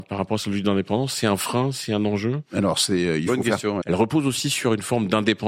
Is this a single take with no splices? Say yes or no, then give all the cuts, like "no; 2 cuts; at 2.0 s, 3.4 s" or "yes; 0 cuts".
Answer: no; 1 cut; at 3.8 s